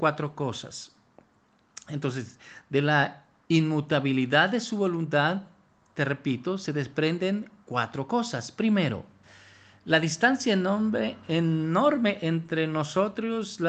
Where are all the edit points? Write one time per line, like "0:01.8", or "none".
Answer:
none